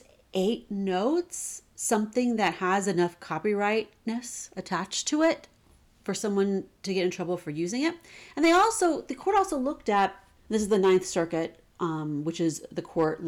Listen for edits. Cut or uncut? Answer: uncut